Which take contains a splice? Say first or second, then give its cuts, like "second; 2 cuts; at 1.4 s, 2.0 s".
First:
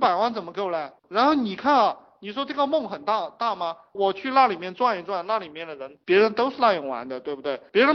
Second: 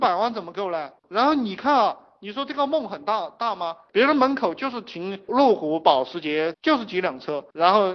second; 2 cuts; at 3.9 s, 6.5 s